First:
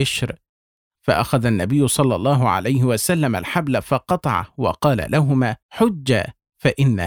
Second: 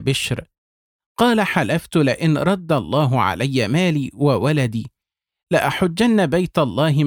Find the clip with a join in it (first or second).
first